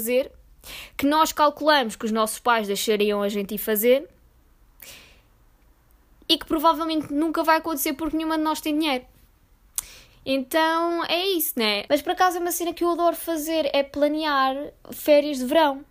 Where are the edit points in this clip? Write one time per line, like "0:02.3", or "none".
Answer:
0:11.9